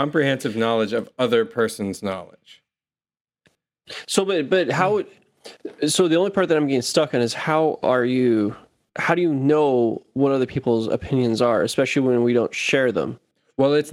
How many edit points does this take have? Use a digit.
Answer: 0